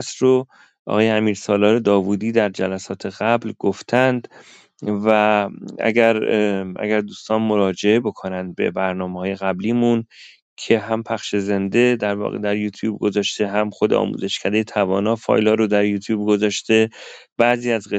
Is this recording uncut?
yes; 0 cuts

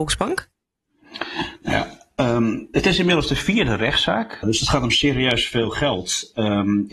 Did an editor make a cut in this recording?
yes; 1 cut; at 4.4 s

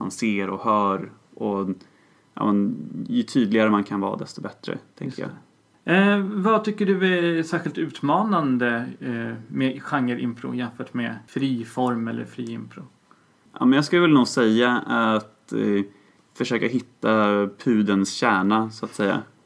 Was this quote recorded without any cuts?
yes; 0 cuts

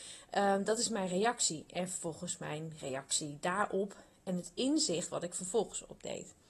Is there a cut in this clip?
no; 0 cuts

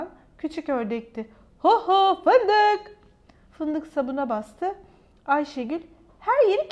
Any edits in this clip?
yes; 1 cut; at 3.5 s

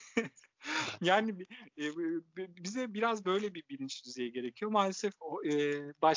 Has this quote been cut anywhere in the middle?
no; 0 cuts

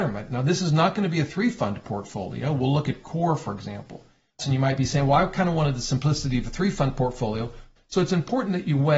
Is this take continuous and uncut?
no; 2 cuts; at 4.4 s, 7.8 s

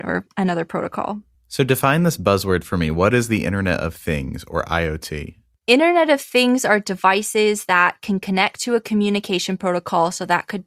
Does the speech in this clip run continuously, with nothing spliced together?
yes; 0 cuts

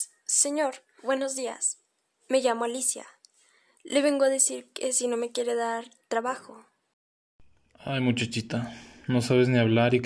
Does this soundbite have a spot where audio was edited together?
no; 0 cuts

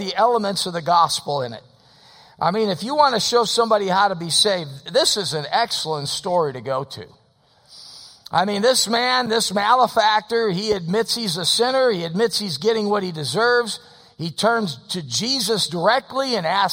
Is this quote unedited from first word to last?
yes; 0 cuts

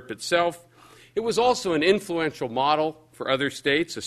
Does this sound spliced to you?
no; 0 cuts

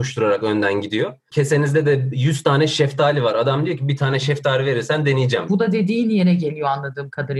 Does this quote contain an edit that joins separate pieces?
yes; 1 cut; at 5.5 s

